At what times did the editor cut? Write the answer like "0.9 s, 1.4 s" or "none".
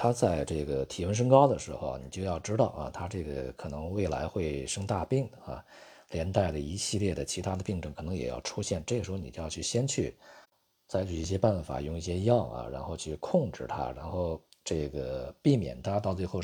none